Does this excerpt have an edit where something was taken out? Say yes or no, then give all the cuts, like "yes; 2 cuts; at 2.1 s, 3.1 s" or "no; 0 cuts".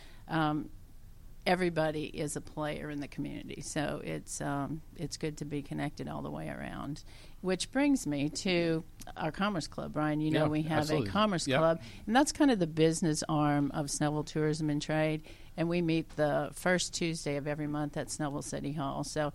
no; 0 cuts